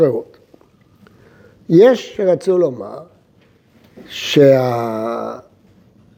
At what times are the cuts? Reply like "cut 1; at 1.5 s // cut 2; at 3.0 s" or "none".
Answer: none